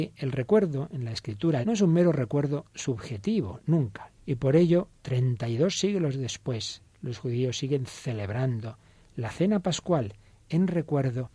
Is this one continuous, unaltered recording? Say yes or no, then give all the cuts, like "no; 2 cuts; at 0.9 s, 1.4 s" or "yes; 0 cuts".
no; 2 cuts; at 1.6 s, 4.2 s